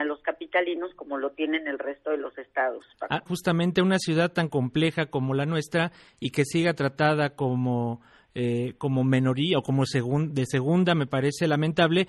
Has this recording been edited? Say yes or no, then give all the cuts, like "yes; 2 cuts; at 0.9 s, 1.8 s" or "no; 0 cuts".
yes; 1 cut; at 3.3 s